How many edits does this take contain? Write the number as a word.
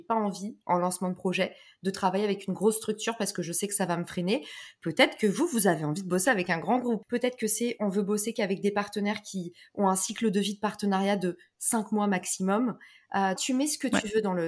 two